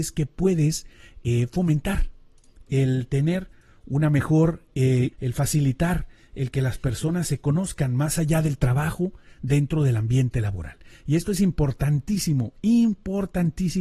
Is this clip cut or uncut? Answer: cut